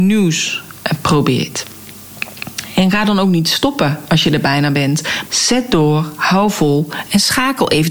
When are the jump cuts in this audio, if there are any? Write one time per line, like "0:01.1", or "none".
0:05.3